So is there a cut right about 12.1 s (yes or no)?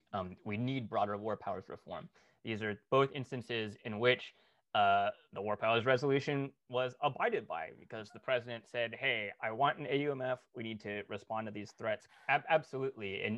yes